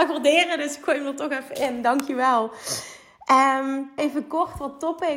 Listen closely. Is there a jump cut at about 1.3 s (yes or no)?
no